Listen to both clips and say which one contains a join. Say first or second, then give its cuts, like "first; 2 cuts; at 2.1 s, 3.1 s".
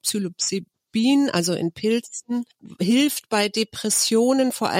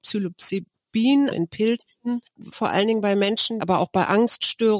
second; 3 cuts; at 1.3 s, 2.5 s, 3.6 s